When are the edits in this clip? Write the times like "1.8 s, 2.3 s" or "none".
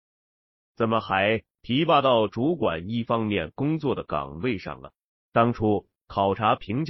none